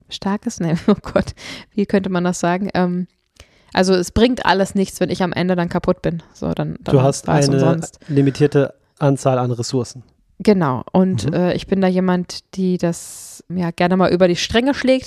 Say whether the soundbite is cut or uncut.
cut